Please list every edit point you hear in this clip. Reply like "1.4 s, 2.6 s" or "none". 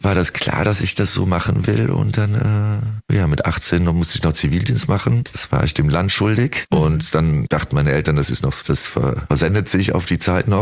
6.7 s, 8.6 s